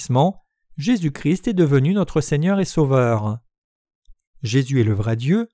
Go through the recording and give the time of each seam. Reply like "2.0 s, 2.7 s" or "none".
4.3 s